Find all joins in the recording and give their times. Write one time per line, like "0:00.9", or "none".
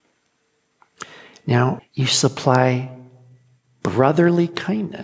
0:01.8